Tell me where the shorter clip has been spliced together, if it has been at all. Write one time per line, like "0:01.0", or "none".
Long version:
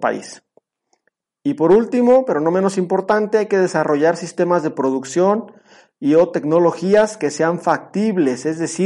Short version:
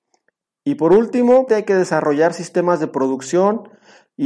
0:01.5